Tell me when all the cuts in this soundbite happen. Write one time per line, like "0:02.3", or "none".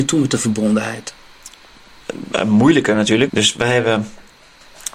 0:03.3